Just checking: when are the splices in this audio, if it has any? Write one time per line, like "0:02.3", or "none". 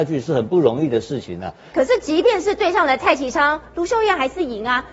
0:01.7